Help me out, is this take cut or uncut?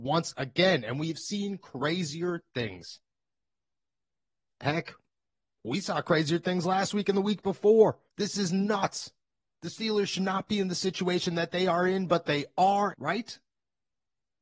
cut